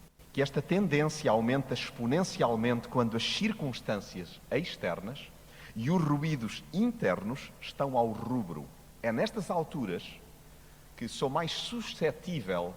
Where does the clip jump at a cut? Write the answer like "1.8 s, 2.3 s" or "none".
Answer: none